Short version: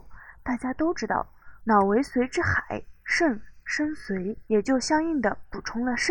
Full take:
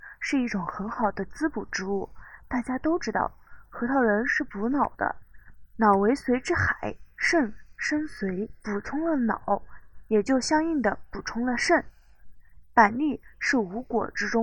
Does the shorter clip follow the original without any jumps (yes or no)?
no